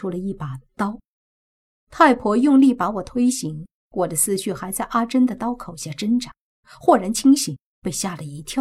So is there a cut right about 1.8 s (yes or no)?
yes